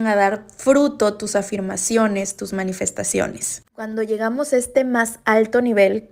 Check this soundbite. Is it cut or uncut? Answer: cut